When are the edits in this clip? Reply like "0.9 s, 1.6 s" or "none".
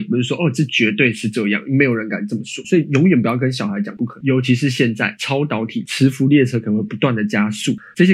2.6 s, 4.2 s, 5.9 s

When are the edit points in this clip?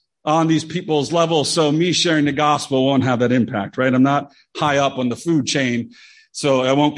none

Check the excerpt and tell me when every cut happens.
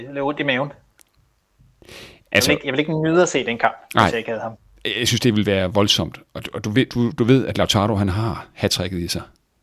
none

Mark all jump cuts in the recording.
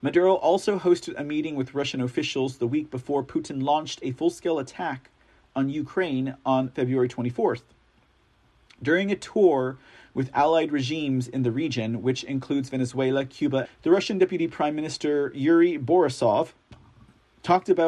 13.7 s

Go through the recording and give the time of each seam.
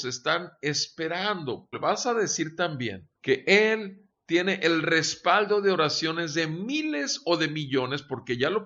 1.7 s, 3.1 s

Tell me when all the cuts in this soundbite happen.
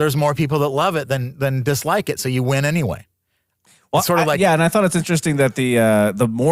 none

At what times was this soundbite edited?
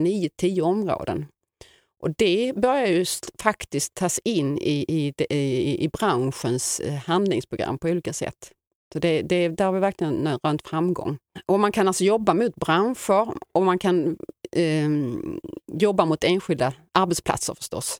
none

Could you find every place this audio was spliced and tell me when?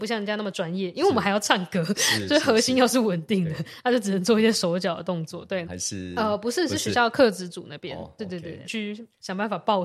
5.6 s, 8.6 s

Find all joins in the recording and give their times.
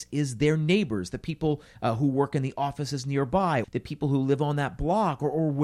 3.6 s

